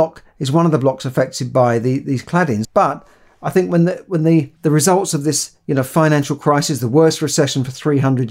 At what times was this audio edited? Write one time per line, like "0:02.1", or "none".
0:02.6
0:04.6